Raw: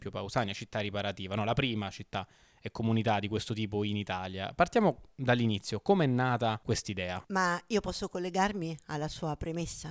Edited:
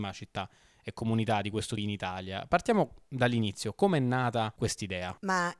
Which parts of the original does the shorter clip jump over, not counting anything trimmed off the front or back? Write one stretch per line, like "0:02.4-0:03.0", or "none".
0:03.6-0:03.8